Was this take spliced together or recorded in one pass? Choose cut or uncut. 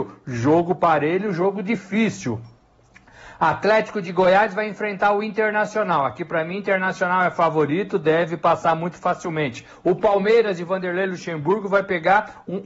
uncut